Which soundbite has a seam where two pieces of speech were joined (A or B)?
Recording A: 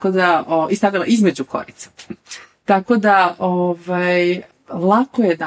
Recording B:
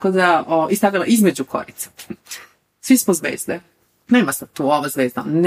B